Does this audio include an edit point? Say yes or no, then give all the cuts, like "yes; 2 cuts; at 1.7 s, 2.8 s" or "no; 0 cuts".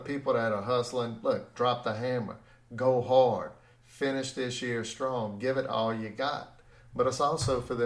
yes; 1 cut; at 1.5 s